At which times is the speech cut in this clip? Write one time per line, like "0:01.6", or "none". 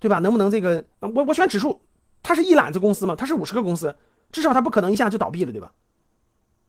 0:00.9